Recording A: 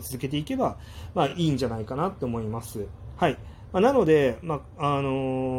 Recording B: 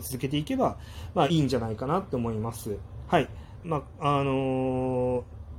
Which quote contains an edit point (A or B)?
B